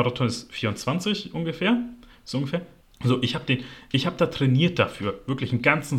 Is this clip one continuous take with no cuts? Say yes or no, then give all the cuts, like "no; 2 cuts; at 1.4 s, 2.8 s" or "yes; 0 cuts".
no; 1 cut; at 2.8 s